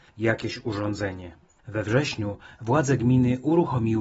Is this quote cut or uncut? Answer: cut